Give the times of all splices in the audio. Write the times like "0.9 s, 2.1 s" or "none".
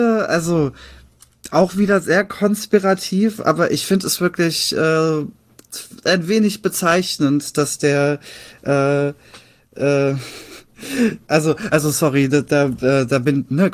none